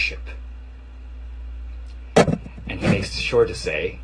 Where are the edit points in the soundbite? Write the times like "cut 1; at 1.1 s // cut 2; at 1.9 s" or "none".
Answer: none

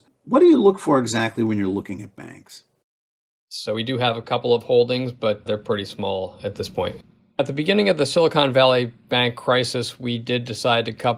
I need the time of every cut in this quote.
none

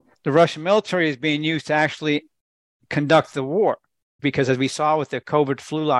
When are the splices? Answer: cut 1; at 4.2 s

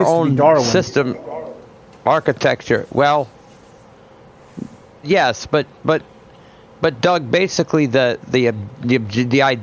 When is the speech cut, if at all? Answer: cut 1; at 5.0 s // cut 2; at 8.3 s

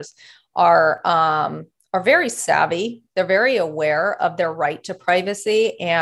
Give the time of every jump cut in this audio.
none

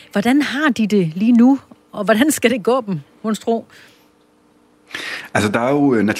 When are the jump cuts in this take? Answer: none

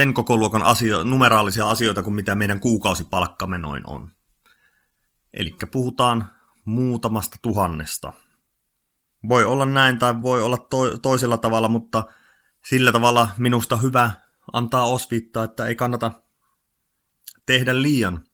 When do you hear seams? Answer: cut 1; at 10.2 s

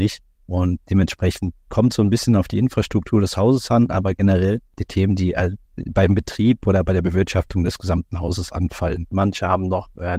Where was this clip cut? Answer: cut 1; at 5.6 s // cut 2; at 9.1 s

